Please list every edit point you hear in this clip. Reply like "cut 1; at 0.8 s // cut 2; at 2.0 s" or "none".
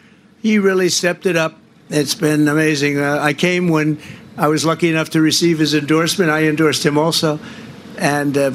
none